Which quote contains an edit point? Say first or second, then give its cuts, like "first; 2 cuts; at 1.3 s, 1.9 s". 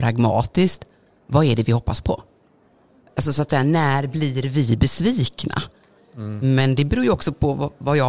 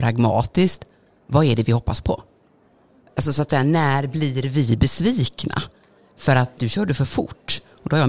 first; 1 cut; at 6.0 s